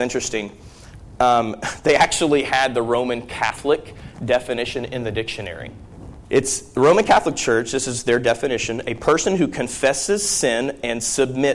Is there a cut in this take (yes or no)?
yes